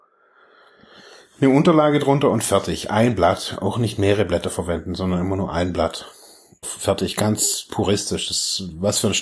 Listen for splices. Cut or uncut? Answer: cut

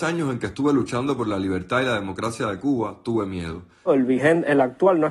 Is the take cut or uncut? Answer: cut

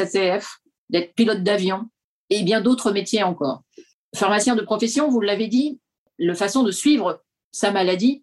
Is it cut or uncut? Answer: uncut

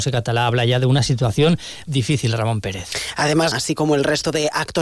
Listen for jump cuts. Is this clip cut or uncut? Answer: cut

